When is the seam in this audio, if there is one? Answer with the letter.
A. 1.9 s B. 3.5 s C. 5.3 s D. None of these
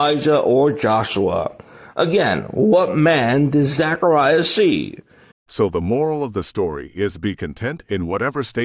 C